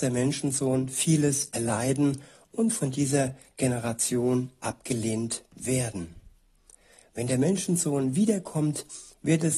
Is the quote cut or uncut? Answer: uncut